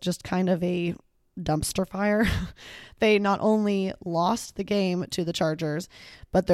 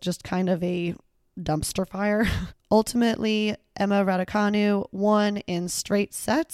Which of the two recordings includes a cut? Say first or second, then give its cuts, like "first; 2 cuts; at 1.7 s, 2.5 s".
second; 1 cut; at 2.5 s